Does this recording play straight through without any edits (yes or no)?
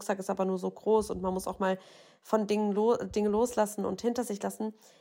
yes